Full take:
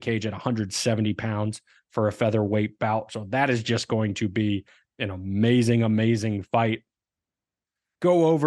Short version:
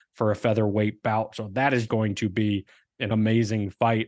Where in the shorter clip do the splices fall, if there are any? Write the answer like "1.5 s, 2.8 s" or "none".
1.9 s, 3.1 s